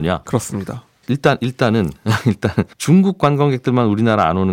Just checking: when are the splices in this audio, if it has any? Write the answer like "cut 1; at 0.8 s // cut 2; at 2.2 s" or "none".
cut 1; at 1.0 s // cut 2; at 2.7 s